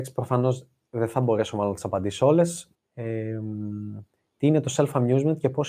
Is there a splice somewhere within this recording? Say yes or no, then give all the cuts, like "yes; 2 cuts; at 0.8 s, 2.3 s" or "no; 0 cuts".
yes; 1 cut; at 2.7 s